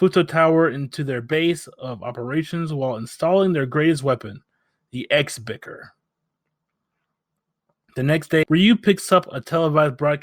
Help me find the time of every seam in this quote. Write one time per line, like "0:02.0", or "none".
0:08.4